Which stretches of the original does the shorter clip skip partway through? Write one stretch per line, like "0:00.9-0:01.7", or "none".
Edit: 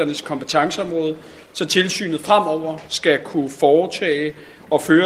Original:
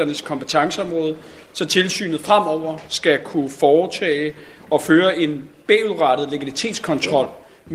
none